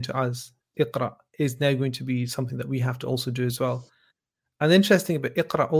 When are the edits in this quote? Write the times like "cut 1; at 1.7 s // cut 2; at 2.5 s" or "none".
none